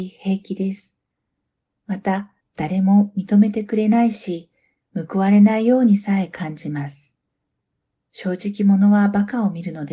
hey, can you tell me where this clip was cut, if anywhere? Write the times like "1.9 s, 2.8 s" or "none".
2.4 s